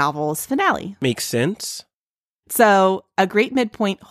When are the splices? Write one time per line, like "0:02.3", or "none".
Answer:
0:02.4